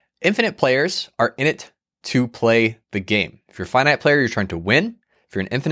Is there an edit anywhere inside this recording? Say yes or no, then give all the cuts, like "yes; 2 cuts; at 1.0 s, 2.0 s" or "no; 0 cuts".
no; 0 cuts